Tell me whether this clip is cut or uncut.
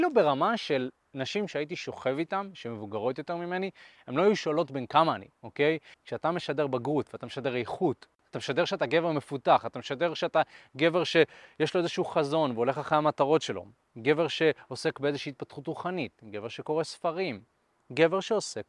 cut